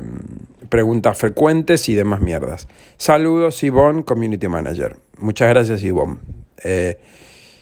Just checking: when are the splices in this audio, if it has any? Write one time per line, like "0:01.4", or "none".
none

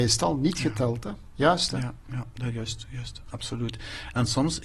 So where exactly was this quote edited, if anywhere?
none

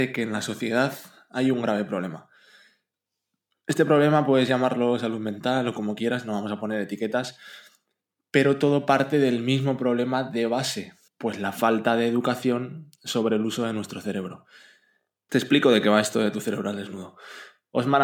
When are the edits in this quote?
0:11.1
0:15.3

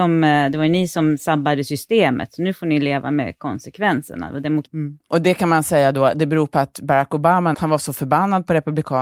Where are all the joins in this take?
0:04.7
0:07.5

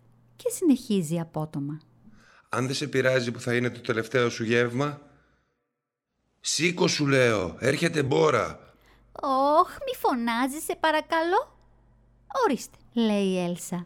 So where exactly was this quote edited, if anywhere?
0:12.8

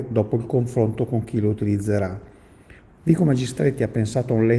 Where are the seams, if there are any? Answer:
0:02.9

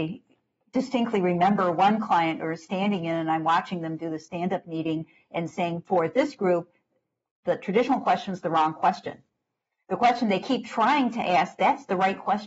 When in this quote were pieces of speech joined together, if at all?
none

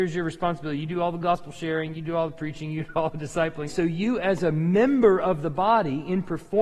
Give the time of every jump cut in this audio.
0:03.7

